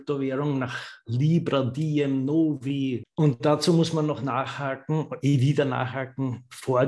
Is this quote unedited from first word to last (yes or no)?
no